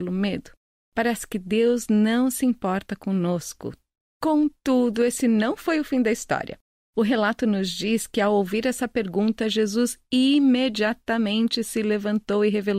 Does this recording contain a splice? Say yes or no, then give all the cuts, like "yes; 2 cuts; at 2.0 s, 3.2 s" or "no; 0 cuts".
no; 0 cuts